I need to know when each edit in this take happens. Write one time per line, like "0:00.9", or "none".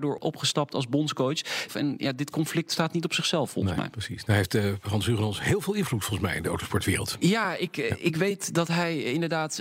0:01.7
0:07.2